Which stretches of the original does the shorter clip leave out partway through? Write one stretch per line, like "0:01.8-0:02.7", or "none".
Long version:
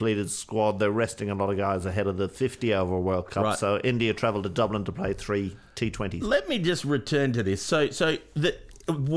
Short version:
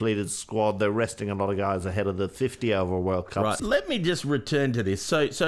0:03.6-0:06.2